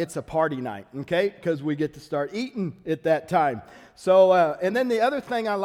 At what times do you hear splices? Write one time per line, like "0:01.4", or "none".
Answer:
none